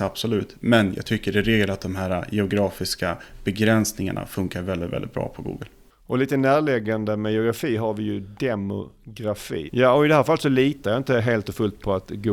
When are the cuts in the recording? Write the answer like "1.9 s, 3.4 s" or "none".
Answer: 9.7 s